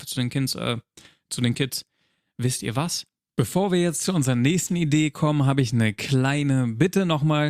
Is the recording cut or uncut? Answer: cut